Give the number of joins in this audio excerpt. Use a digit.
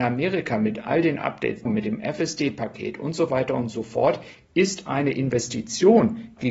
1